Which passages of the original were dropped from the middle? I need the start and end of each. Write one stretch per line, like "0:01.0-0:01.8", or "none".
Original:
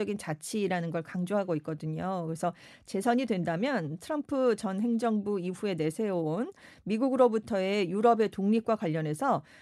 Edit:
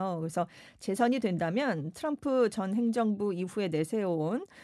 none

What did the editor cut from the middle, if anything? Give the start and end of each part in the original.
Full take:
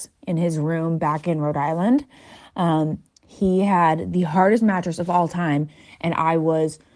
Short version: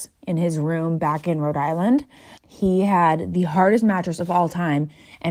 0:02.3-0:03.1

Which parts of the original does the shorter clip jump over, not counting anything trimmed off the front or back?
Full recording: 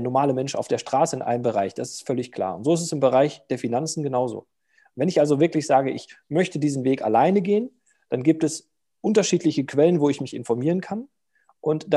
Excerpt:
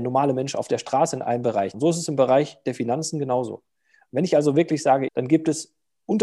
0:01.7-0:02.6
0:05.9-0:08.0

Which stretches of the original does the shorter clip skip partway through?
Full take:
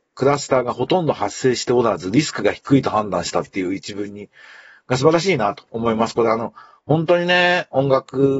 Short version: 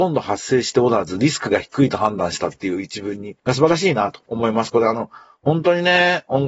0:04.3-0:04.8

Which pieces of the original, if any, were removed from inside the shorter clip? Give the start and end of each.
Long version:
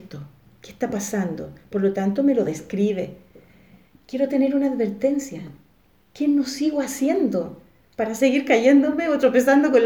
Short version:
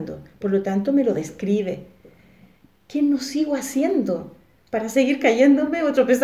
0:04.0-0:05.9

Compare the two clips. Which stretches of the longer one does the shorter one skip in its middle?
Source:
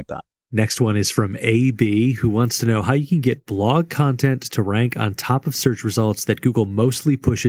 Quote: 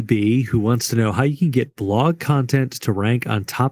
none

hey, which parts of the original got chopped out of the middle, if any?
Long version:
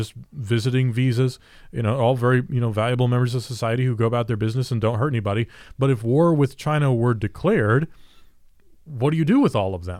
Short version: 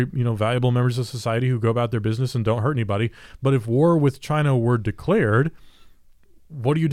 none

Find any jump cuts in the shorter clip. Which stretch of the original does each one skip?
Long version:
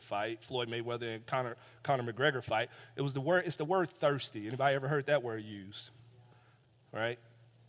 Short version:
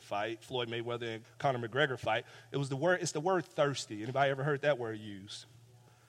0:01.2-0:01.7

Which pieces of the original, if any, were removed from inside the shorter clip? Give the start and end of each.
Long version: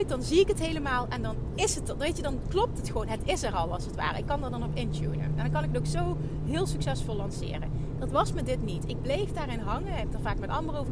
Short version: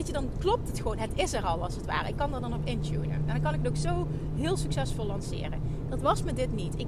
none

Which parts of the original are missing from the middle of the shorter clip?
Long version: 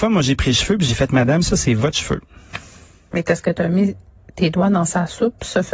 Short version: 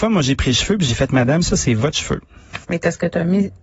0:02.6-0:03.1

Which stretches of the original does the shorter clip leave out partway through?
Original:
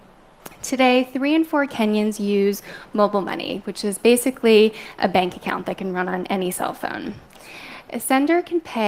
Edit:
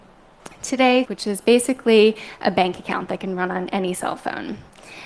0:01.1-0:03.6

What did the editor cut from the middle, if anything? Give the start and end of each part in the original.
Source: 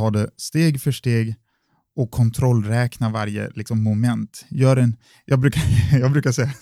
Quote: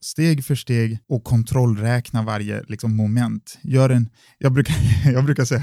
0:01.4-0:01.9

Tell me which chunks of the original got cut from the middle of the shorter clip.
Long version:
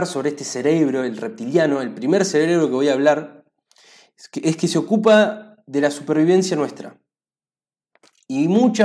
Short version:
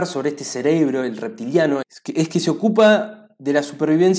0:01.8-0:04.1

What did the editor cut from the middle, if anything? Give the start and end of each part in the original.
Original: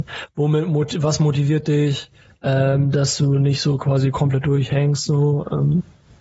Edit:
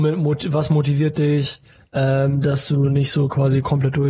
none

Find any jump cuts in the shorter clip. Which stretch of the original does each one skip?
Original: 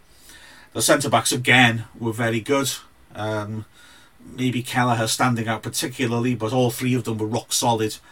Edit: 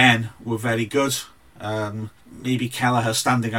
0:03.7-0:04.1

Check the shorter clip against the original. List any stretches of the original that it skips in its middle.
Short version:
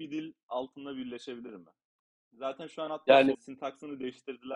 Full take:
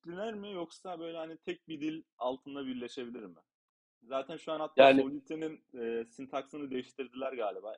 0:05.0-0:06.1

